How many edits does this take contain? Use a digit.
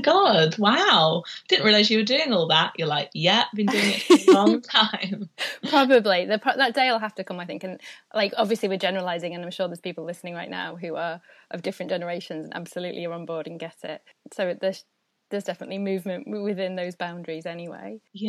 0